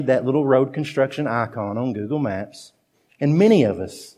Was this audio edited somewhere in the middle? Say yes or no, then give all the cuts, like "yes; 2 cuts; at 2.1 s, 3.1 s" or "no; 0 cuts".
yes; 1 cut; at 3.1 s